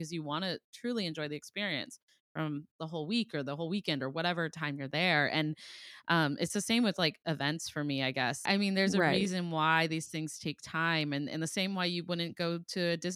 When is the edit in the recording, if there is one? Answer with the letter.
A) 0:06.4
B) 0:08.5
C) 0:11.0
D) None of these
B